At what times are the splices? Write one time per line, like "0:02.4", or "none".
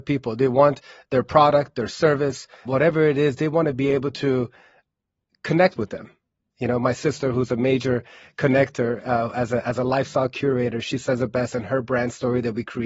0:02.6